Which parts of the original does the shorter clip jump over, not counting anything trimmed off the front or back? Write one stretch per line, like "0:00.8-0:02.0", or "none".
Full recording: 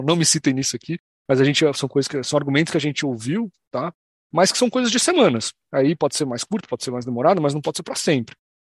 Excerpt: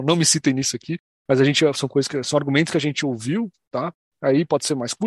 0:04.1-0:05.6